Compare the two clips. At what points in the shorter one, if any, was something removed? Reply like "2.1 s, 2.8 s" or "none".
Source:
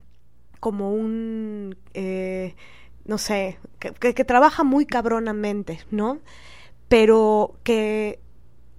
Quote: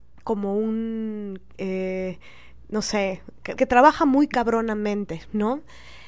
3.6 s